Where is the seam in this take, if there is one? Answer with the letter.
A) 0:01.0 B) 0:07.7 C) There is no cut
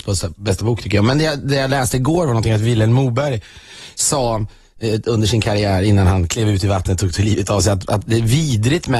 C